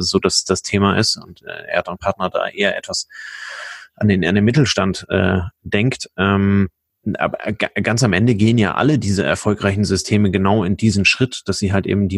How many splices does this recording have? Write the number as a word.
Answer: zero